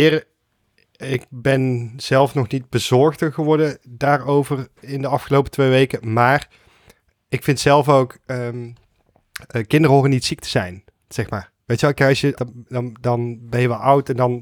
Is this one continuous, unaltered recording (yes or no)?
no